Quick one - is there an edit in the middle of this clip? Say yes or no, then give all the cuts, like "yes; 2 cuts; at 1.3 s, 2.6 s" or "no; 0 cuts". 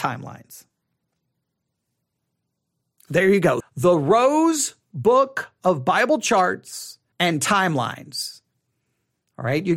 yes; 2 cuts; at 3.6 s, 7.1 s